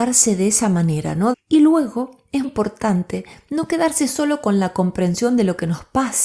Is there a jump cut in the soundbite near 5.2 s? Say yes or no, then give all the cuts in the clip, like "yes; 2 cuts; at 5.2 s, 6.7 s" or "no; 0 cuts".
no; 2 cuts; at 1.3 s, 2.4 s